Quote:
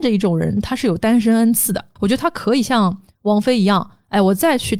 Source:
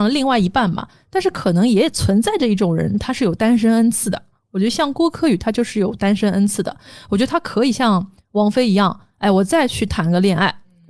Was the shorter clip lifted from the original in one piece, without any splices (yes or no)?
no